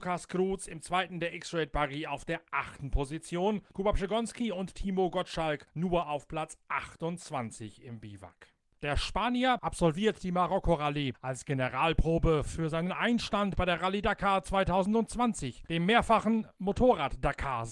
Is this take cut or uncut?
cut